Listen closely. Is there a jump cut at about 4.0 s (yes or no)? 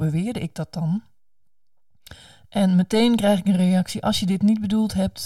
no